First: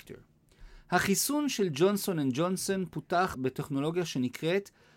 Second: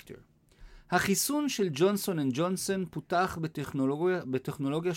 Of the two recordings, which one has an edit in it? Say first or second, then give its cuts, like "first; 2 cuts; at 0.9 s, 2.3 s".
first; 1 cut; at 3.3 s